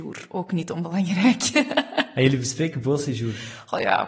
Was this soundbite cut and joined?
no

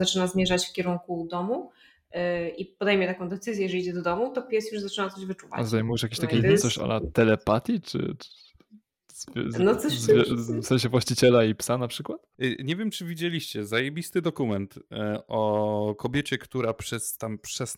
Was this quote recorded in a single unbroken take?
no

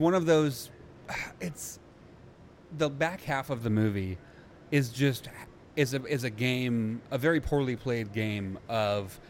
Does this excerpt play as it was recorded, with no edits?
yes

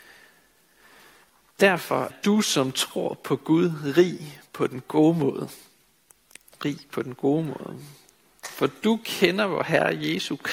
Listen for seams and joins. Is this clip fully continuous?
no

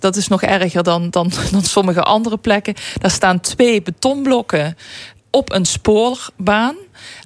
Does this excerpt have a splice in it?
no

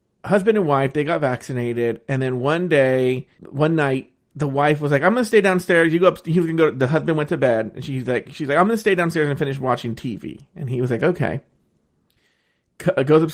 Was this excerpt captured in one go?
no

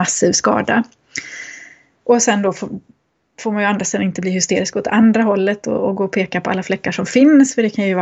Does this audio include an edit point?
no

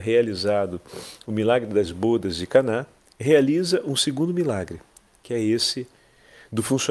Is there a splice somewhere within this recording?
no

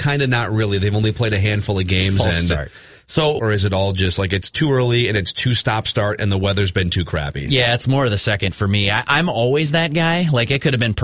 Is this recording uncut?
no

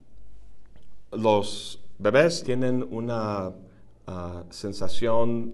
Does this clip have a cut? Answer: yes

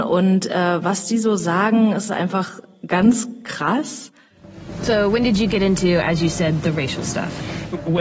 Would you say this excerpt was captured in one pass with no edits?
yes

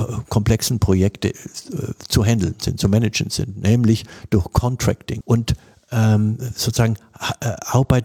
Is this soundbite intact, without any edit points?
no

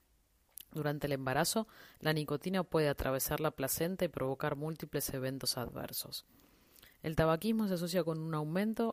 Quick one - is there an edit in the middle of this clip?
no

